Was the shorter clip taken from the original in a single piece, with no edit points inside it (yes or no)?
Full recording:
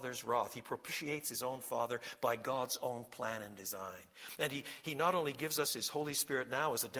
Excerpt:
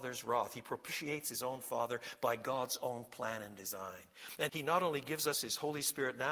no